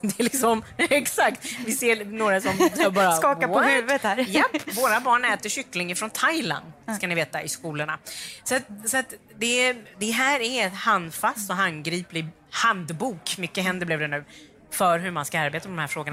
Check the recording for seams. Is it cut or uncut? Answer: uncut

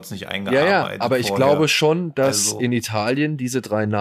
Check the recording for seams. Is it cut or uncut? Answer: uncut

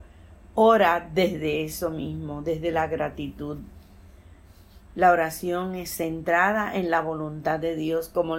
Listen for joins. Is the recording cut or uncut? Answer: uncut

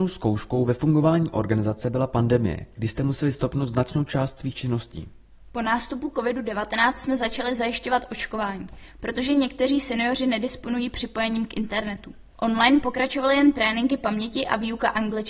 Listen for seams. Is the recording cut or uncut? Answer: cut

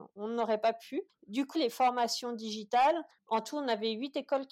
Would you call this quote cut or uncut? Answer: cut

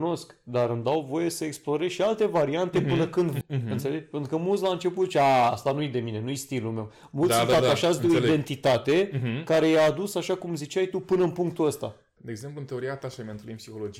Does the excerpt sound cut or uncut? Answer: cut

